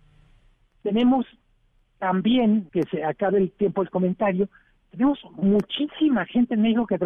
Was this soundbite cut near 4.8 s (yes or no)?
no